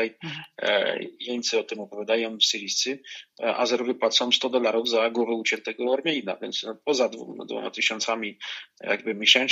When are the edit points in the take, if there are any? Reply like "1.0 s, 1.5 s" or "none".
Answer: none